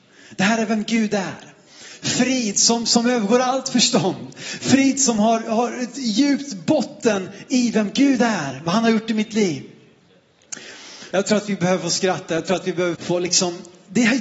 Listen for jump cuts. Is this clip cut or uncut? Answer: cut